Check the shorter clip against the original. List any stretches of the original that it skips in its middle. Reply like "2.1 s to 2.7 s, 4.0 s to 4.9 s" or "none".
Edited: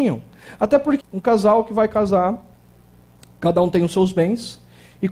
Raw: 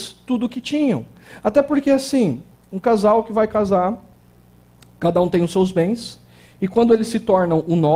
1.8 s to 2.6 s